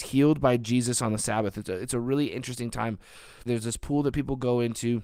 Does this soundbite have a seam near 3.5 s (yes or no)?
yes